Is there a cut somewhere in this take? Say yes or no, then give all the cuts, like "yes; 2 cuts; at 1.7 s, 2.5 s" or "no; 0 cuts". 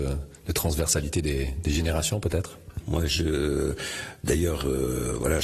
yes; 1 cut; at 2.8 s